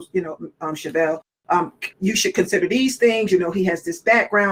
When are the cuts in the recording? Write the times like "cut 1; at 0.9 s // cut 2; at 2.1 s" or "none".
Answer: cut 1; at 1.9 s